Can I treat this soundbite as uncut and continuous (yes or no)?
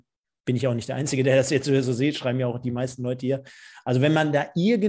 yes